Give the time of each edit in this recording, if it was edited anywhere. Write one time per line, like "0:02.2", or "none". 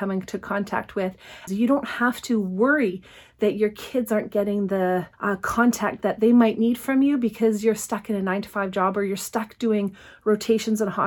0:01.5
0:05.1

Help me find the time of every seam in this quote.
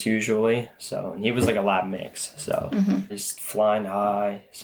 0:03.1

